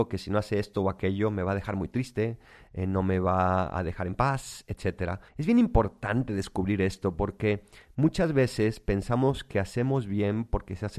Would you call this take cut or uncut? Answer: cut